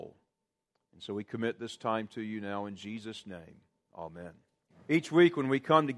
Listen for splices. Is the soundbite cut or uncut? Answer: cut